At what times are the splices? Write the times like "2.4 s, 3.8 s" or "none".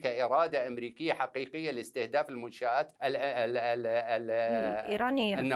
3.0 s

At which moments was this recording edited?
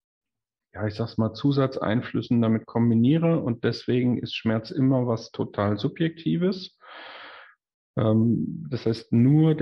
none

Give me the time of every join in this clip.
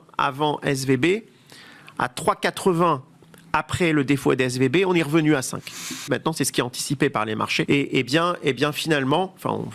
6.1 s, 7.7 s

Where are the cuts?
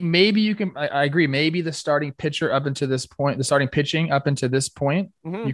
none

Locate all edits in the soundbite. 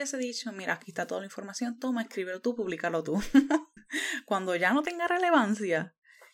3.8 s

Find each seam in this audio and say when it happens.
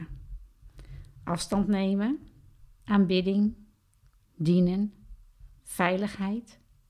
2.8 s, 5.6 s

